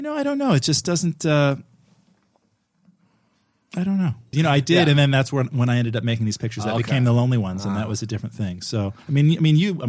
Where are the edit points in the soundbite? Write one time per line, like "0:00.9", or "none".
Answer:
0:04.3